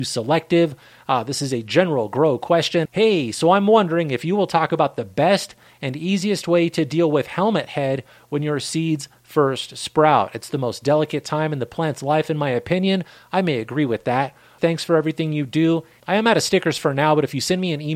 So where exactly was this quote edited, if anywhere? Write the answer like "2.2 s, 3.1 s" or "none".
2.9 s, 14.6 s

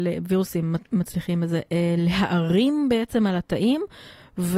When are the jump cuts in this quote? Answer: none

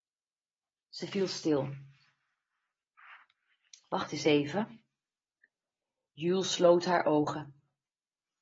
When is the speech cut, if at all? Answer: none

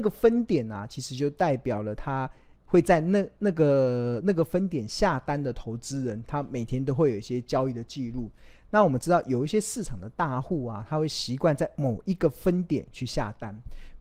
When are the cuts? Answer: none

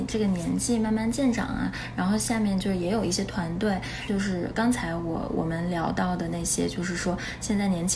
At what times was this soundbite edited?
4.1 s

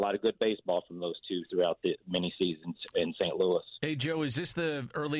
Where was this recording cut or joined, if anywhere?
none

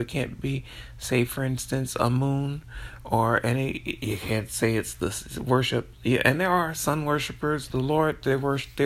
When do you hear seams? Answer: 7.7 s

